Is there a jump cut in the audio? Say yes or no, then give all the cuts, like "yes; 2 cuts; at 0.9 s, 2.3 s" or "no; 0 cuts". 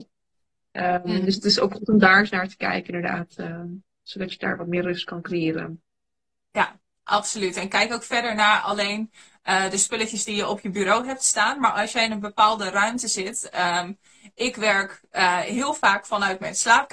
no; 0 cuts